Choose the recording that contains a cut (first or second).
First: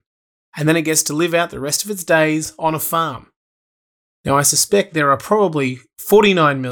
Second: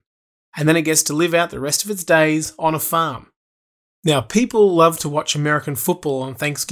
second